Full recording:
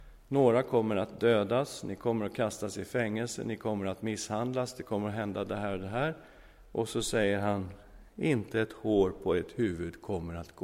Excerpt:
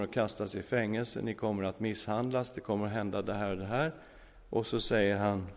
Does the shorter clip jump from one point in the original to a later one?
no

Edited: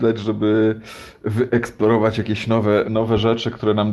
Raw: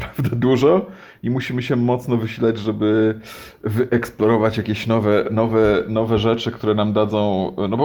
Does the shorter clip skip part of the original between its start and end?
yes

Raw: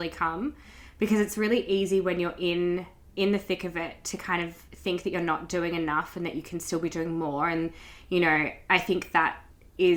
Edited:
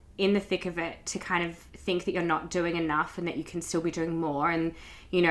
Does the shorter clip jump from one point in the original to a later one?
no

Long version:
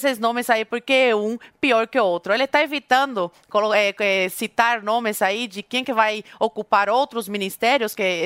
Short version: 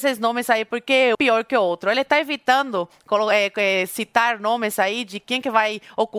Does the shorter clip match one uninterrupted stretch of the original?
no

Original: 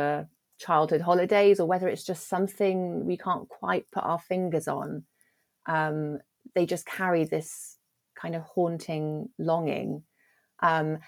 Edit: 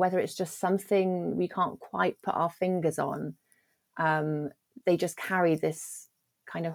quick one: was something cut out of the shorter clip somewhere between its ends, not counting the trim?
no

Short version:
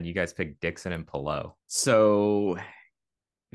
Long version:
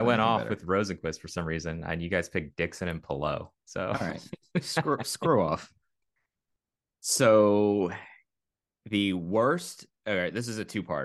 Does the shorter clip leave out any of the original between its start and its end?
yes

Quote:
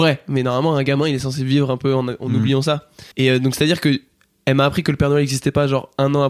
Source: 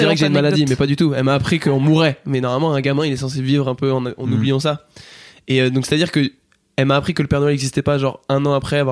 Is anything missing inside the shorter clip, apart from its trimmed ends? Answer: yes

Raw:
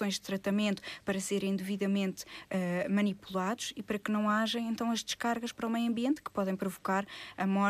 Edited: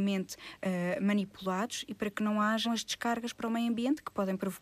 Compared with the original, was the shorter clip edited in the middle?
yes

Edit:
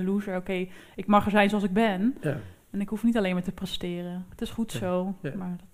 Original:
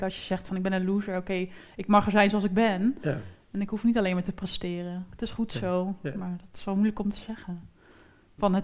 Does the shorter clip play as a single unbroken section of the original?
yes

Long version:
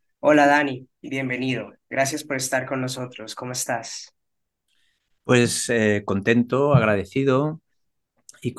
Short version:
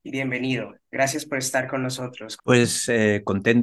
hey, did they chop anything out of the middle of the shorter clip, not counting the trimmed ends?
yes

